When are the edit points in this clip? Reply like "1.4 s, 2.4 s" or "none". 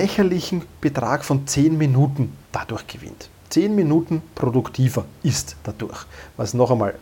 none